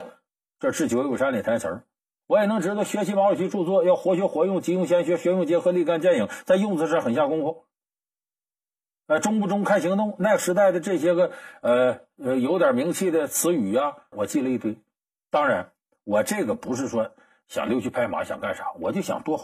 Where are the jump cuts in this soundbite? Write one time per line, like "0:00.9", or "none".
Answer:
0:14.1